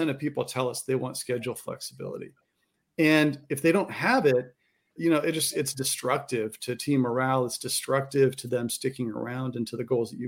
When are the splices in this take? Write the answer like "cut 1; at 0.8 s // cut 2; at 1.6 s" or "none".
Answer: cut 1; at 5.0 s